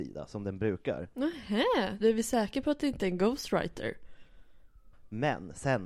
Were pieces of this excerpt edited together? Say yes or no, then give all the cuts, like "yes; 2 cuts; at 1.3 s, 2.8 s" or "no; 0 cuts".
yes; 1 cut; at 2.0 s